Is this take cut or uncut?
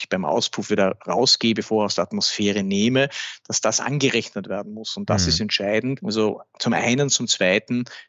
uncut